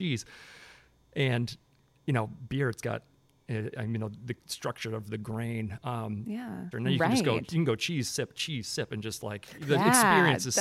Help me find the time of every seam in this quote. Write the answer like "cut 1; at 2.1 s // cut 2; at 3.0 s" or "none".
cut 1; at 6.7 s